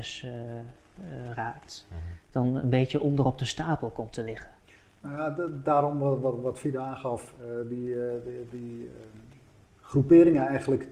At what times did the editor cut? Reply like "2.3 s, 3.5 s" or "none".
none